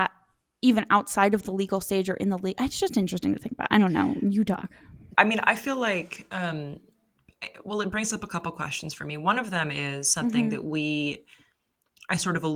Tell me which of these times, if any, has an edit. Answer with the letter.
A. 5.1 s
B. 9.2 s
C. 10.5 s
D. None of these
A